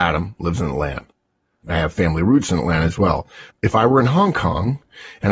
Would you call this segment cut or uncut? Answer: cut